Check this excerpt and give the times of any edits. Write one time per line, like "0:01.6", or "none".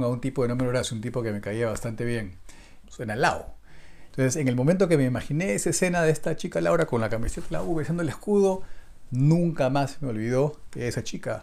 0:02.8
0:04.1